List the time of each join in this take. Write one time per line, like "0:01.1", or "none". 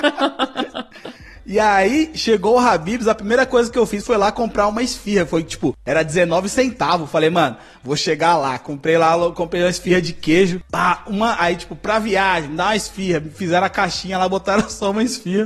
none